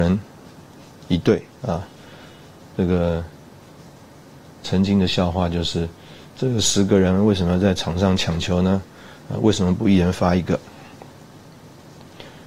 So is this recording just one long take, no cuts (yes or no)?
yes